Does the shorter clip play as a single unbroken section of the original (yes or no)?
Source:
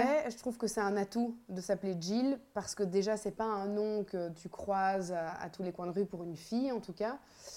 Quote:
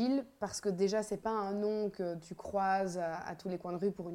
yes